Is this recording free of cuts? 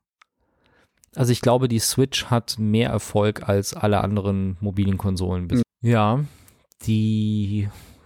no; 1 cut; at 5.6 s

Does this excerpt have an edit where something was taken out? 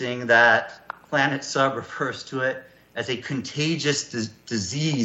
no; 0 cuts

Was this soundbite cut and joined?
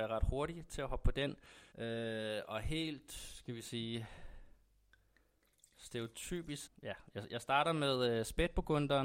yes; 2 cuts; at 1.7 s, 6.7 s

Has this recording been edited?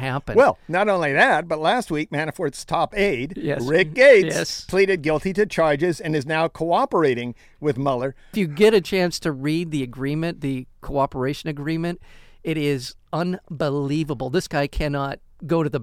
no; 0 cuts

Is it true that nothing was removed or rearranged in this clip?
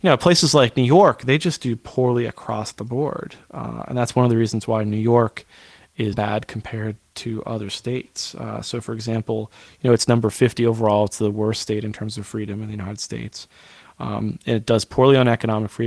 no; 1 cut; at 6.1 s

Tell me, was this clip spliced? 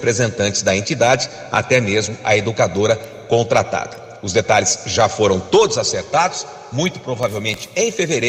no; 0 cuts

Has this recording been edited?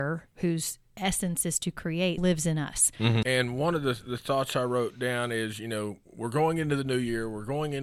yes; 2 cuts; at 2.2 s, 3.2 s

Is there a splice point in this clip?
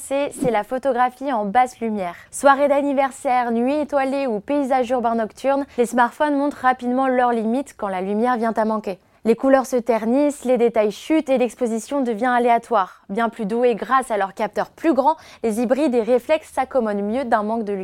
yes; 1 cut; at 2.3 s

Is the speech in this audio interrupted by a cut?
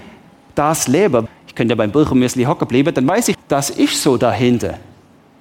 yes; 2 cuts; at 1.3 s, 3.3 s

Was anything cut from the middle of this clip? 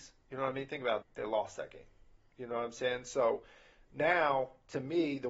yes; 1 cut; at 1.0 s

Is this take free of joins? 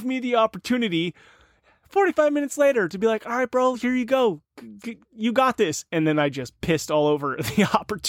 yes; 0 cuts

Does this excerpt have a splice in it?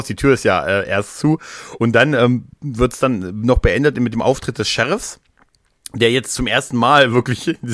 no; 0 cuts

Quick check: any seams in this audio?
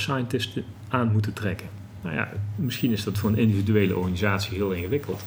no; 0 cuts

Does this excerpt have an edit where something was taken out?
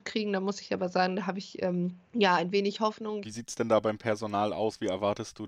yes; 2 cuts; at 2.0 s, 3.2 s

